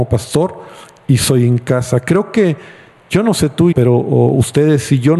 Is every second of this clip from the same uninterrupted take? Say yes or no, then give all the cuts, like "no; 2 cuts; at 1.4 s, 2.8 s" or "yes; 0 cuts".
no; 1 cut; at 3.7 s